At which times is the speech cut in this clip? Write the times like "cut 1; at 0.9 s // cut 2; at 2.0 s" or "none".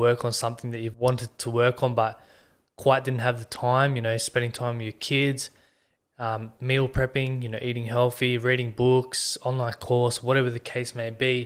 cut 1; at 0.9 s